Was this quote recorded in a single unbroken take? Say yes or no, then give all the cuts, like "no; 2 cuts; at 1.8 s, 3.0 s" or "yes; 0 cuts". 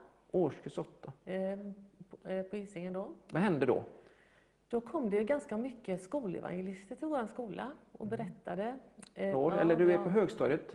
no; 2 cuts; at 3.3 s, 9.3 s